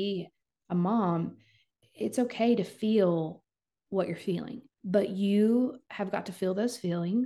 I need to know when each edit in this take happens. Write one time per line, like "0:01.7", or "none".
0:04.7

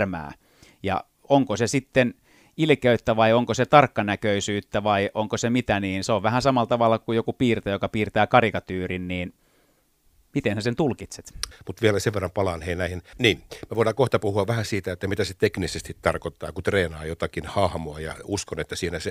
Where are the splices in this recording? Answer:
0:11.5
0:13.1

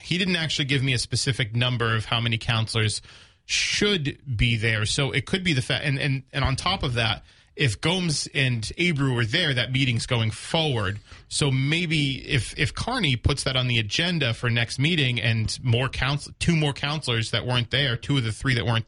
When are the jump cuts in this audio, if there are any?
none

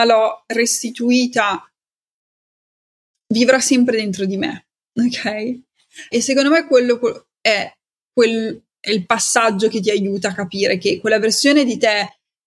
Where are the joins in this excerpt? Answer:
0:06.1

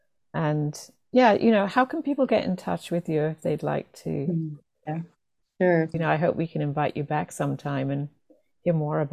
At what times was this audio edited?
0:04.9
0:05.9

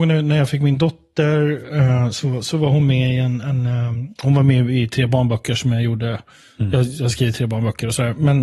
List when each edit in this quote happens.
none

